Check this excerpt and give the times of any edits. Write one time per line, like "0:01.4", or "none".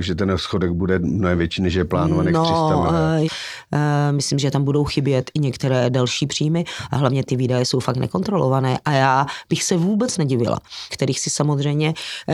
0:03.2
0:10.9